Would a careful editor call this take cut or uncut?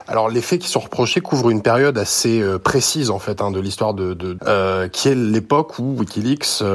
cut